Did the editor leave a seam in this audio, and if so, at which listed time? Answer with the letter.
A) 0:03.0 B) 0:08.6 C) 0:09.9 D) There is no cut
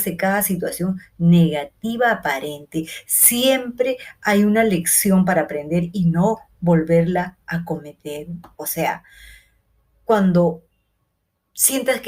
B